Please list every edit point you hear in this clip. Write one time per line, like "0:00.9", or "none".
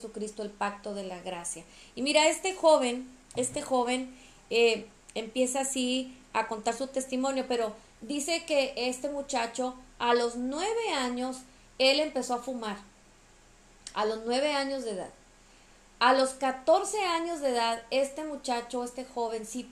none